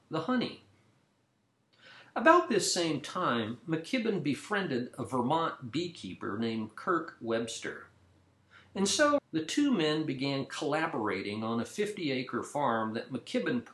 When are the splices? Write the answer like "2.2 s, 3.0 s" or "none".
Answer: 9.2 s